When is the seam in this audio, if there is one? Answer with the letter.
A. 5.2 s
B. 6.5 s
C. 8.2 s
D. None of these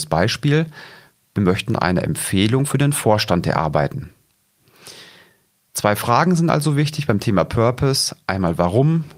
D